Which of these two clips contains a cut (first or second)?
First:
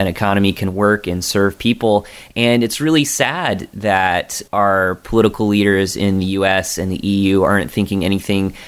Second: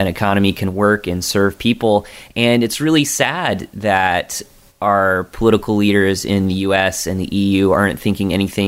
first